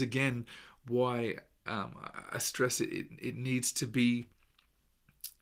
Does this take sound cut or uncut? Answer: uncut